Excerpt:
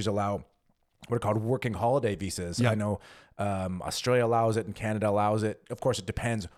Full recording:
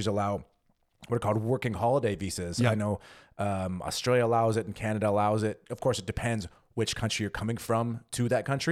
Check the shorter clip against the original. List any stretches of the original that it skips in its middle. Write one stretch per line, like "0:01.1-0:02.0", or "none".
none